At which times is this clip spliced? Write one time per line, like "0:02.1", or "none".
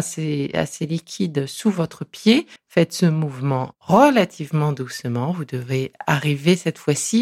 0:02.6